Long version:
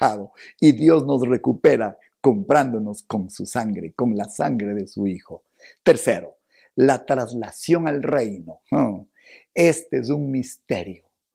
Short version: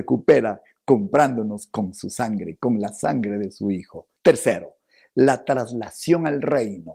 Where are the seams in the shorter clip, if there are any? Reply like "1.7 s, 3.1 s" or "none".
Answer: 4.2 s